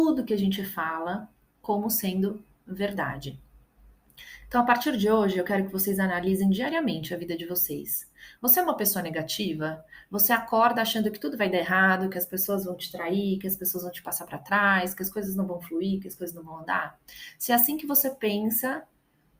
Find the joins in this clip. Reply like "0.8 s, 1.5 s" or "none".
8.4 s